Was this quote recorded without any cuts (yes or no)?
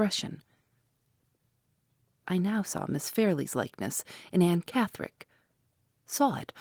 no